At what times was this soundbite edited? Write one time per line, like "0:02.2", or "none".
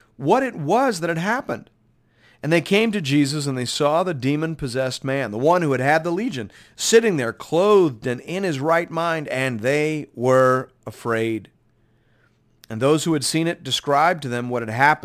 none